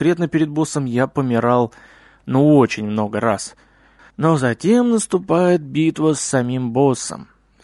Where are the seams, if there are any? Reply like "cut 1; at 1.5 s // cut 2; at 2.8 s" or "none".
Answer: cut 1; at 4.0 s